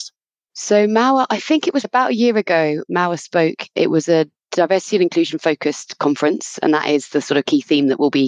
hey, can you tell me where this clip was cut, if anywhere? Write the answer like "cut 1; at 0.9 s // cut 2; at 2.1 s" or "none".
cut 1; at 1.8 s